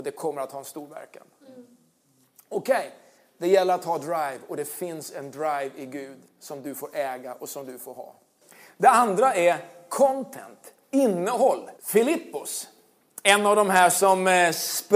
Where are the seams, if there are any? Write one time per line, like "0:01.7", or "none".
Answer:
0:11.8